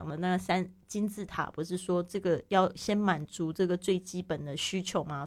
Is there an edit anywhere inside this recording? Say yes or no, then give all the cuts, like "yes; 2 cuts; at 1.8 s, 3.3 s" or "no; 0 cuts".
no; 0 cuts